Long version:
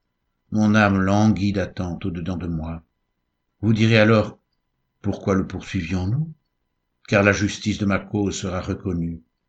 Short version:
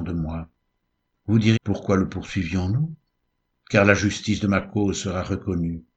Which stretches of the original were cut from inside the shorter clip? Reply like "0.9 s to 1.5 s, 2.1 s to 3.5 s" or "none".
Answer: 3.9 s to 4.9 s